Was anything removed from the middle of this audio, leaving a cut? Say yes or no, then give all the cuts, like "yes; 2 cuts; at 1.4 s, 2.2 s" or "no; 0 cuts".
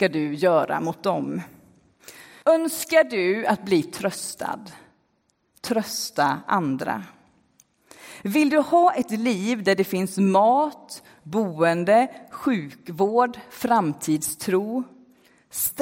yes; 1 cut; at 2.4 s